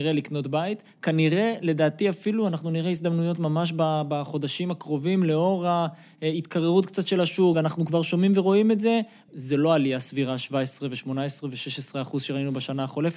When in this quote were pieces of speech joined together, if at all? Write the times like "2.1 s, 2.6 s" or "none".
7.5 s, 9.3 s